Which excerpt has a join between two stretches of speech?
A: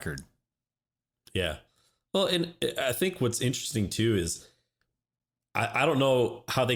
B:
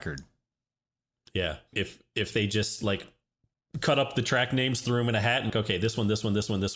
B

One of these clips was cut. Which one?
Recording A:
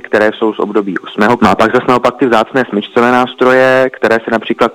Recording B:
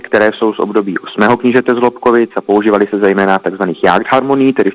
A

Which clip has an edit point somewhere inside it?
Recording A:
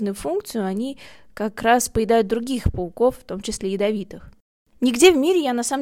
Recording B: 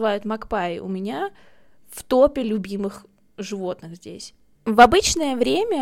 B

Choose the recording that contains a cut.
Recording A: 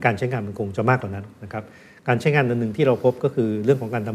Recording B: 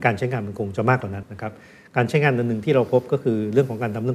B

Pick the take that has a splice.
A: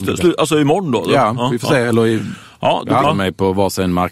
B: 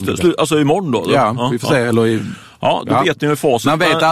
A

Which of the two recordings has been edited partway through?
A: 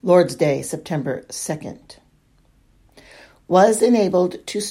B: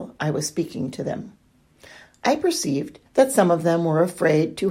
B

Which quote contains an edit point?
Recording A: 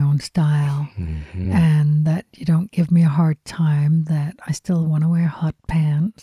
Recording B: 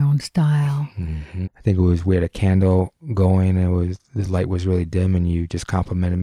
B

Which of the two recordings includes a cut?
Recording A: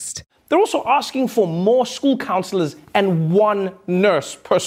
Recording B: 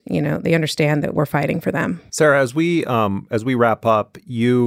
B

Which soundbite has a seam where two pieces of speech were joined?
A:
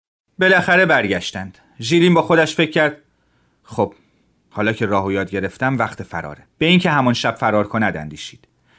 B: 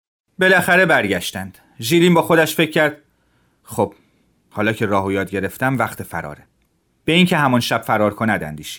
A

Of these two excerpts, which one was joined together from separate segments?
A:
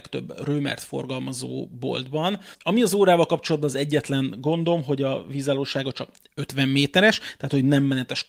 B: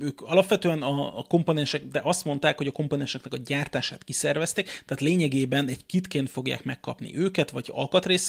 A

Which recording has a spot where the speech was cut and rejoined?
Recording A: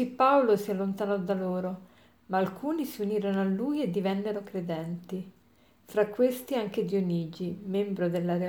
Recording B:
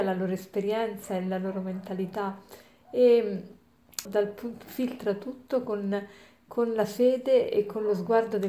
B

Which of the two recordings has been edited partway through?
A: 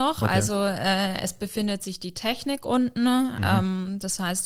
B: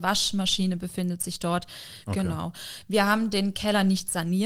B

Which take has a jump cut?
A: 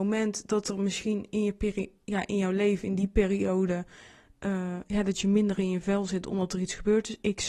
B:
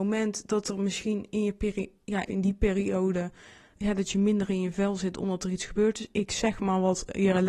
B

